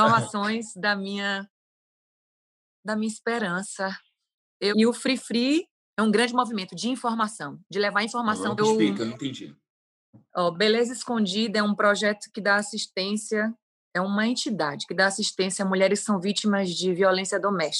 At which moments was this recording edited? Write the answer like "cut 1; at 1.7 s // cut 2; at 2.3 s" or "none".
cut 1; at 4.7 s // cut 2; at 8.6 s